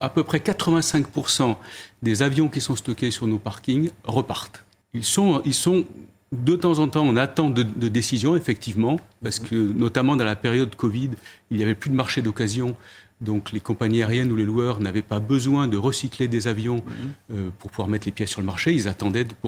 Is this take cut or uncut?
uncut